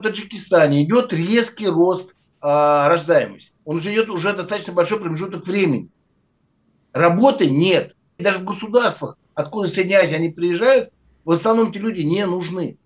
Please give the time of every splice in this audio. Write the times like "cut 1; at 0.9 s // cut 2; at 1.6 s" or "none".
cut 1; at 3.6 s // cut 2; at 8.2 s